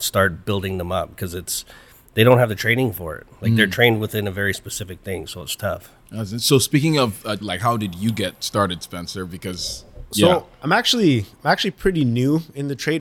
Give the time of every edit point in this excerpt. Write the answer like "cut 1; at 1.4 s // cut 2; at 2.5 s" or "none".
cut 1; at 7.4 s